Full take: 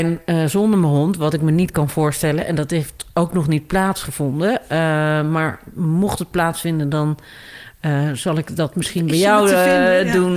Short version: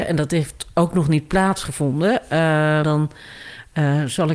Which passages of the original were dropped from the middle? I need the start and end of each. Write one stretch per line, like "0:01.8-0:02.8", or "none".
0:05.2-0:06.9